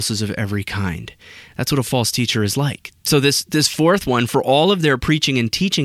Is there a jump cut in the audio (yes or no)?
yes